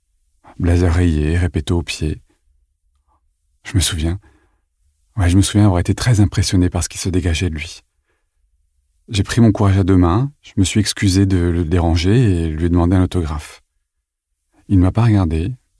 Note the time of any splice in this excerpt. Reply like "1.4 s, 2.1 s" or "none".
none

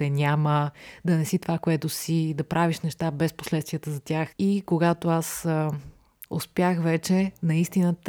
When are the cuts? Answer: 4.3 s, 6.2 s

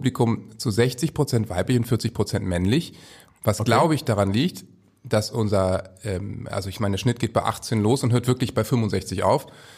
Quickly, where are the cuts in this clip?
none

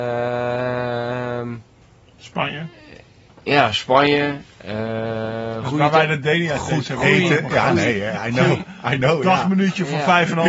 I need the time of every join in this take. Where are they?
none

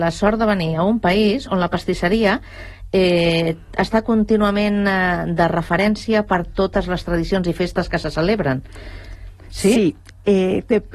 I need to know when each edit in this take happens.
none

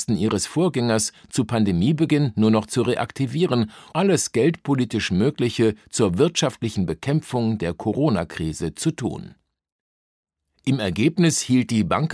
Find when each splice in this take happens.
3.9 s

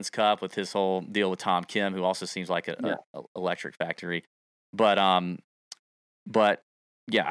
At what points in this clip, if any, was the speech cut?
none

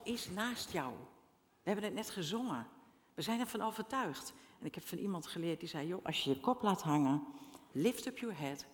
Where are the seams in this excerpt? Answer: 4.5 s, 7.7 s

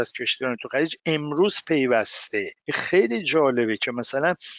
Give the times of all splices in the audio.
2.6 s

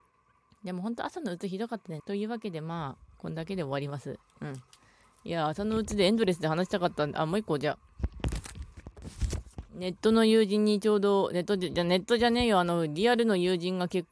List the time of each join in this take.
2.0 s

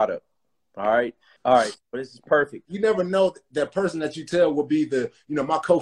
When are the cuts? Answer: 1.4 s, 2.7 s

